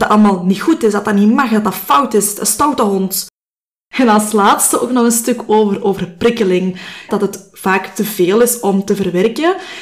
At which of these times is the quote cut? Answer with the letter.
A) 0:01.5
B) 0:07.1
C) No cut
B